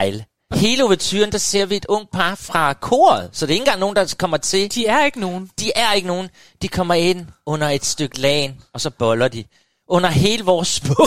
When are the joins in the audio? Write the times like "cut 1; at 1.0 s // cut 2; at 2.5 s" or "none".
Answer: none